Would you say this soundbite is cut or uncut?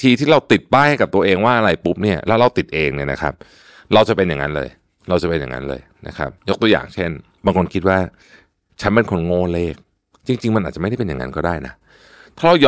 uncut